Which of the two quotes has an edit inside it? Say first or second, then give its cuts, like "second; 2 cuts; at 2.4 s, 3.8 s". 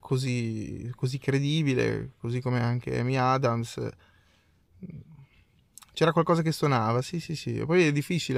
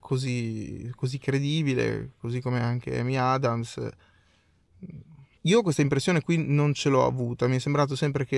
second; 1 cut; at 5.4 s